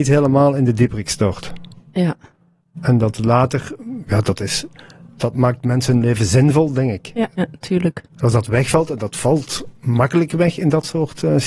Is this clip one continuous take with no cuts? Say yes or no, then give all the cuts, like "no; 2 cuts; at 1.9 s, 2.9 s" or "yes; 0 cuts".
no; 1 cut; at 7.3 s